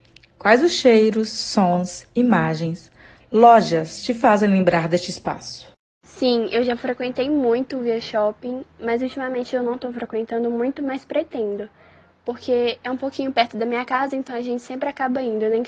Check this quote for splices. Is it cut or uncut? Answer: uncut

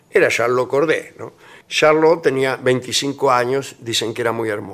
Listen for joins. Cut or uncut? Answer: cut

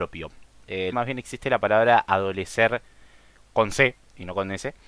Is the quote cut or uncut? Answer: cut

